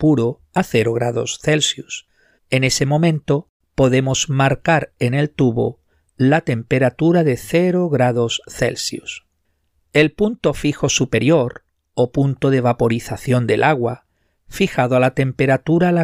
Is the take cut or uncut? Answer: cut